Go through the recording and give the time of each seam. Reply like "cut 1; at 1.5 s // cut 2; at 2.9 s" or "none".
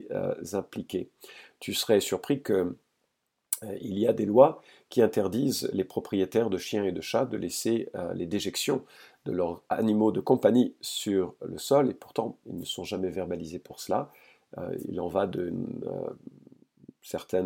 none

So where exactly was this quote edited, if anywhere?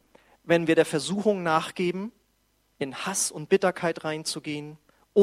none

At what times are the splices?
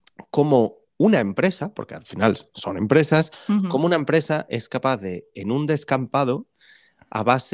none

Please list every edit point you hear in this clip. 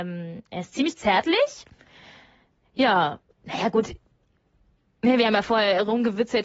cut 1; at 3.3 s

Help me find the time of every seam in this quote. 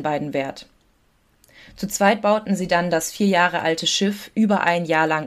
none

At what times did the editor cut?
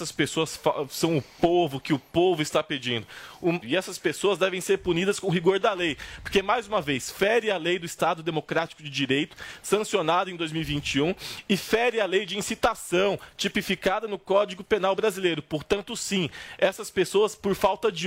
cut 1; at 3.6 s

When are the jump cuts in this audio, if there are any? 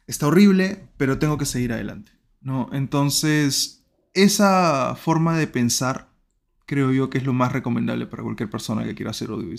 none

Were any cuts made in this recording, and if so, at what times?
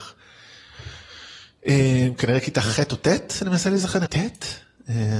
cut 1; at 4.1 s

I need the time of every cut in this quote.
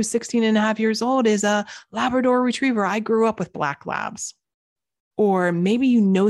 cut 1; at 5.1 s

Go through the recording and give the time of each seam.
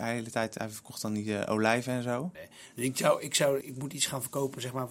cut 1; at 2.3 s // cut 2; at 3.6 s

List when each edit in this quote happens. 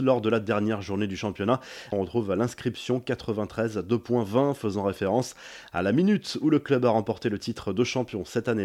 cut 1; at 1.9 s

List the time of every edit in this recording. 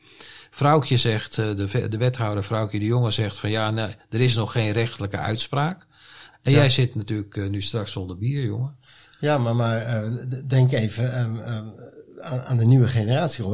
cut 1; at 6.3 s

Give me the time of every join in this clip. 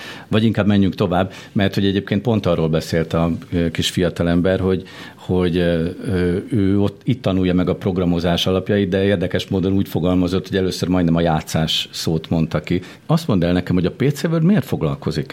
cut 1; at 13.0 s

